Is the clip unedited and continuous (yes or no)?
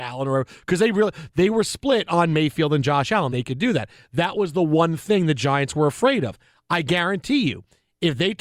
no